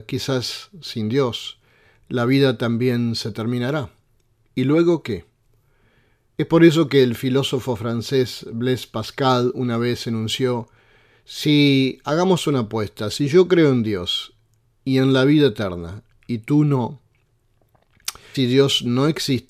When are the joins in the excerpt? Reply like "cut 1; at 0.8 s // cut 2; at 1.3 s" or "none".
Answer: cut 1; at 18.3 s

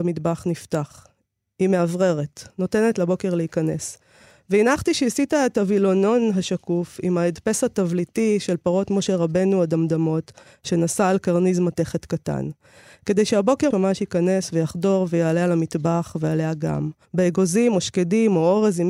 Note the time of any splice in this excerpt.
cut 1; at 13.7 s // cut 2; at 17.0 s

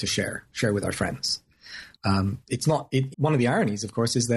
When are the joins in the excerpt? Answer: cut 1; at 1.9 s // cut 2; at 3.1 s

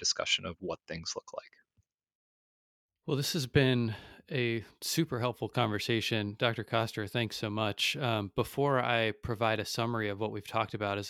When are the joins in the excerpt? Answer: none

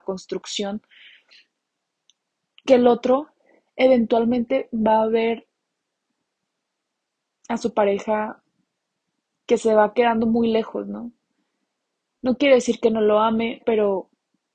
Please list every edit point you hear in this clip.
cut 1; at 13.6 s

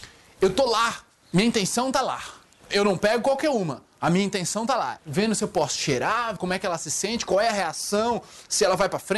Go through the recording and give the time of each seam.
cut 1; at 5.0 s // cut 2; at 6.4 s

